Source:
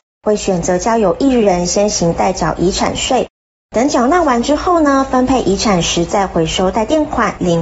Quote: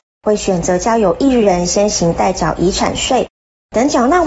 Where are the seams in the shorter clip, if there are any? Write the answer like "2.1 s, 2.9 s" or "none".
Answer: none